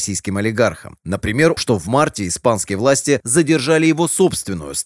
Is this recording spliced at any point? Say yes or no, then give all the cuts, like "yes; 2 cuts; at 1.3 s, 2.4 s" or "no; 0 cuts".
yes; 1 cut; at 1.6 s